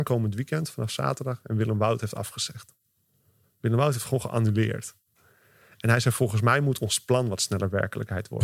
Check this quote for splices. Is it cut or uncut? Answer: uncut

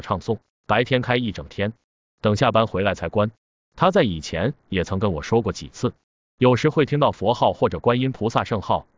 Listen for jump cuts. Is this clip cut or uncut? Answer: uncut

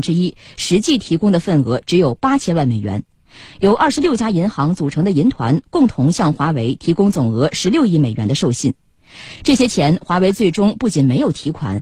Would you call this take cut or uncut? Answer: uncut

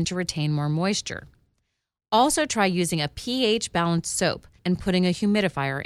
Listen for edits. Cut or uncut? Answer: cut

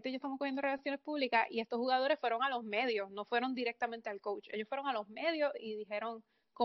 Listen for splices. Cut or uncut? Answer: uncut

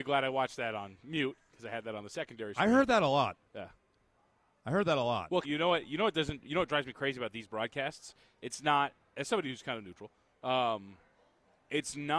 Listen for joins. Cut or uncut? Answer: cut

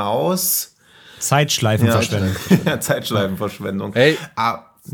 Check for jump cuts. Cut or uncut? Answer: uncut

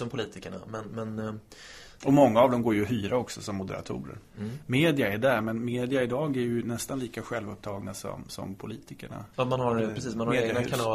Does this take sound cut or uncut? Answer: cut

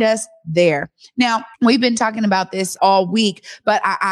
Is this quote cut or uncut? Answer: cut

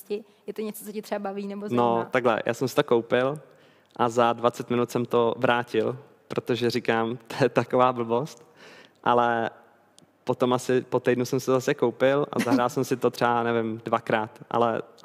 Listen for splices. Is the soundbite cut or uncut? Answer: uncut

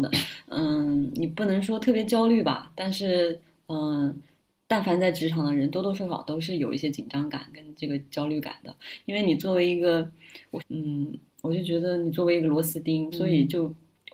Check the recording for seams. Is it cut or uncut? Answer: cut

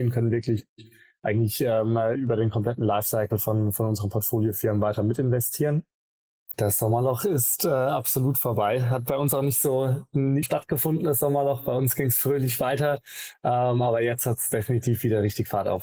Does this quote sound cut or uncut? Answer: cut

